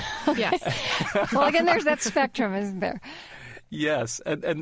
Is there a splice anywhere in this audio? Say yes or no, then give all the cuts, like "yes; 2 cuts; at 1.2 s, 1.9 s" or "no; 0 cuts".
no; 0 cuts